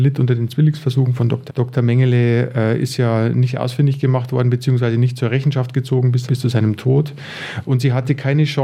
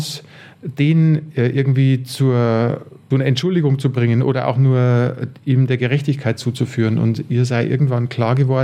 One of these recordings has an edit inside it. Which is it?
first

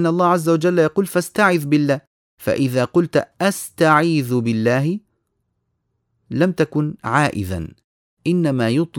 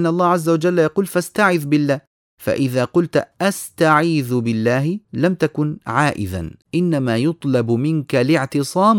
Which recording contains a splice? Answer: second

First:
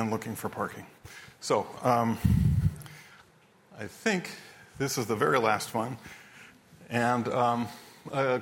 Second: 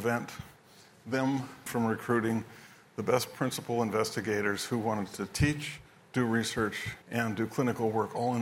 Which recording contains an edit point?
second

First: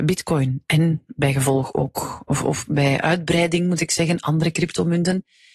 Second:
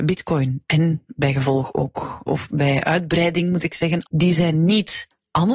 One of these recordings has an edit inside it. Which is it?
second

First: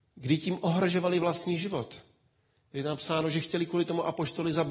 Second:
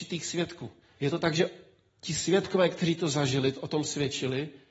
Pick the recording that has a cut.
second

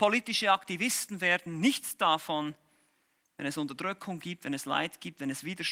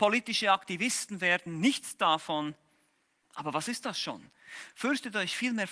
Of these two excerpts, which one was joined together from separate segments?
second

